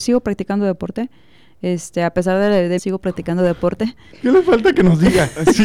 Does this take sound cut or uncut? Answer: cut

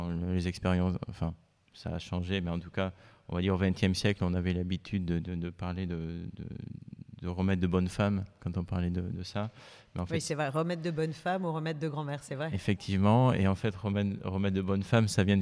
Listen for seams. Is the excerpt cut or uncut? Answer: uncut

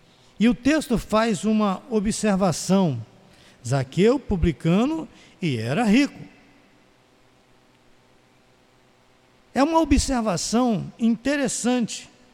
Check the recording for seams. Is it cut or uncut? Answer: uncut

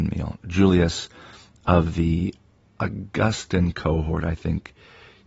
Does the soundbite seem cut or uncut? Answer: uncut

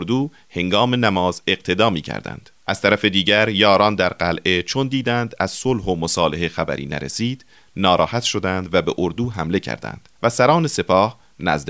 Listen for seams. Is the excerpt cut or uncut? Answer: cut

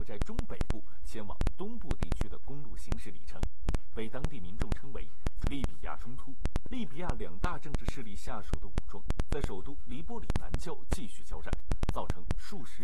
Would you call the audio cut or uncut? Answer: cut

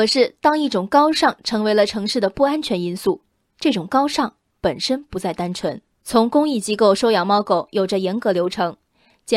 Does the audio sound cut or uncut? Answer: cut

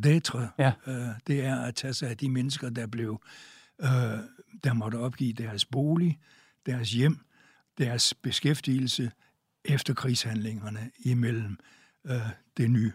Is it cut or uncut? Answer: uncut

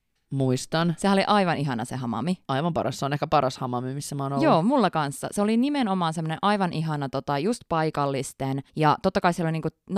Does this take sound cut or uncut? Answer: cut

